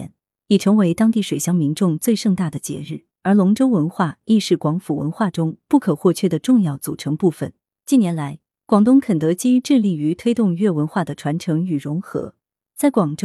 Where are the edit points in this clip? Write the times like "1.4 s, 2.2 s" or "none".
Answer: 3.1 s

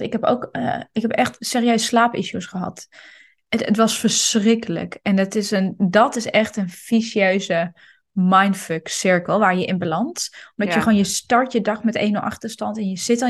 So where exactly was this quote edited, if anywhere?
none

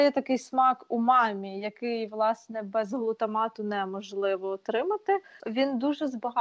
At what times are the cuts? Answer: 5.4 s

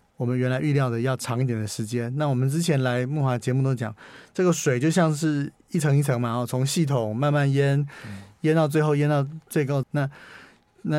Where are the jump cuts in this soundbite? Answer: 9.8 s

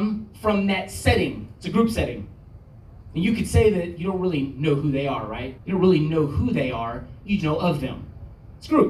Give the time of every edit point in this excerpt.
5.6 s, 7.4 s

